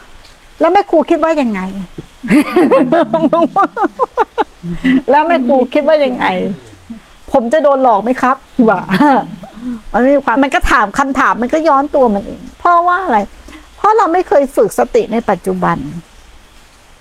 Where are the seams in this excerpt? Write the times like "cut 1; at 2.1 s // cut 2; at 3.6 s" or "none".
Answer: cut 1; at 10.4 s // cut 2; at 12.5 s